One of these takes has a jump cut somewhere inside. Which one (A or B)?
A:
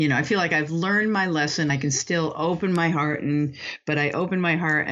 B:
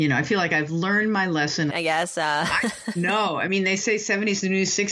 B